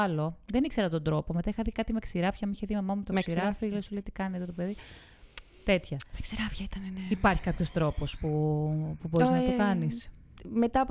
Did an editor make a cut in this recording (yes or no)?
no